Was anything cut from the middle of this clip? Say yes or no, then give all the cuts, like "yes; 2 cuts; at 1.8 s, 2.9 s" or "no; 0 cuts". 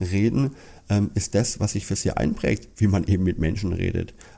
no; 0 cuts